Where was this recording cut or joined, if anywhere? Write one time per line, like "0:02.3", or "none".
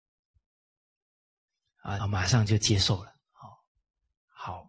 0:02.0